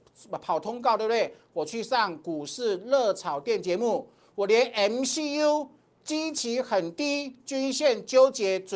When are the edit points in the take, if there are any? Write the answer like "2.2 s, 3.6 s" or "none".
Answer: none